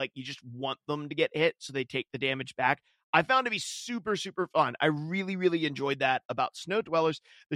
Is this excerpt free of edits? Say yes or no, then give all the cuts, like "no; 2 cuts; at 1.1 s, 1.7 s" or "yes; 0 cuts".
yes; 0 cuts